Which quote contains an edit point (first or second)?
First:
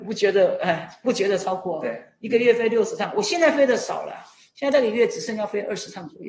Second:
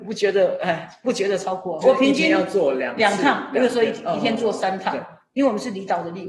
second